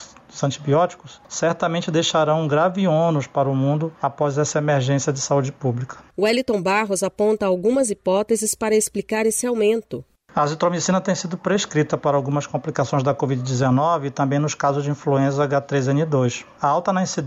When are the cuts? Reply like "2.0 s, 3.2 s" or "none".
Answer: 6.1 s